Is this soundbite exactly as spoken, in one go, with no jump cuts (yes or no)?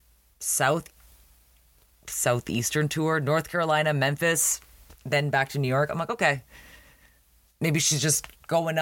yes